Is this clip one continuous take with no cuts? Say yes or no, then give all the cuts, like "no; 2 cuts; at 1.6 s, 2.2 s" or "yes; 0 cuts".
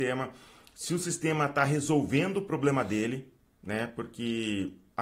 yes; 0 cuts